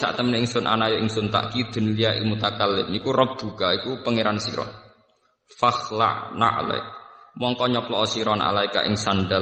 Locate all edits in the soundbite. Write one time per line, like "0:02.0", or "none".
none